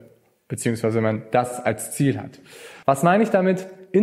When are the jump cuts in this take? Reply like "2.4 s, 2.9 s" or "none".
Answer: 2.8 s